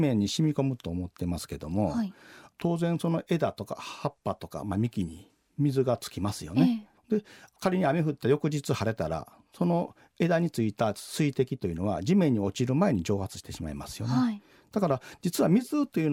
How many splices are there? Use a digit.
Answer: 1